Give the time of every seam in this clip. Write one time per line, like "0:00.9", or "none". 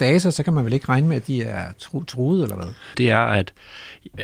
0:02.9